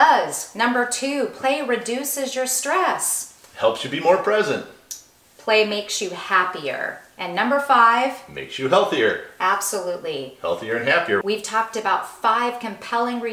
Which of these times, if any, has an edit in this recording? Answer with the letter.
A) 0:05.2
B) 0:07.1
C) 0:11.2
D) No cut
C